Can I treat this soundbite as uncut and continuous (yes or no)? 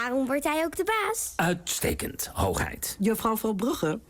yes